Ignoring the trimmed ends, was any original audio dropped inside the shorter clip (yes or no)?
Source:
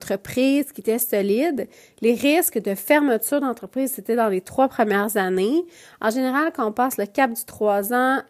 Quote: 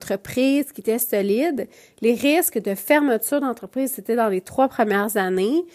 no